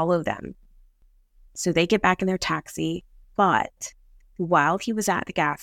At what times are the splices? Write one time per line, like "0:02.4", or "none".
0:03.2